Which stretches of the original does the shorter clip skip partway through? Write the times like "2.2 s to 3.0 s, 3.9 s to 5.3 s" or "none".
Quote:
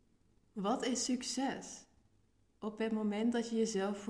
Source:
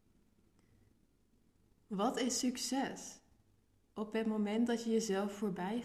none